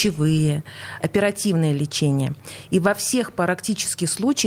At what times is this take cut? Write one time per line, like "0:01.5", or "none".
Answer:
0:01.0